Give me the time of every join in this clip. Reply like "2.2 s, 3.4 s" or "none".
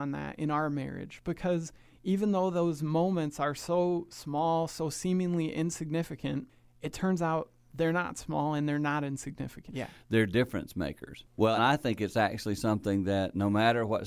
9.7 s, 11.6 s